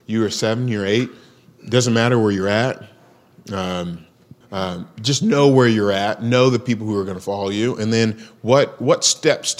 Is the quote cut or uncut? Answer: cut